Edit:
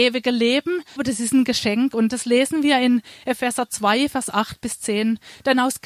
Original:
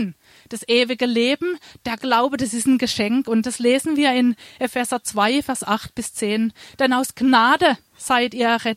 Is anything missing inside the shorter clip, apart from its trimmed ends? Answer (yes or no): yes